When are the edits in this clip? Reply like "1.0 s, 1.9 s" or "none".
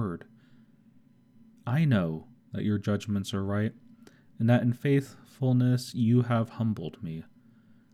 2.3 s